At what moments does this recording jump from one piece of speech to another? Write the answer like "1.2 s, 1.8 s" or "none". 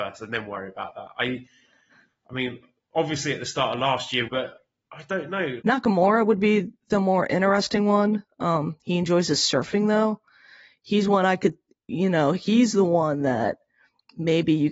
4.3 s, 5.6 s